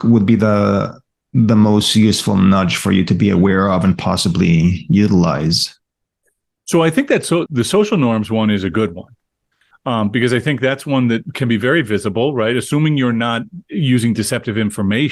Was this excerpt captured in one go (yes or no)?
no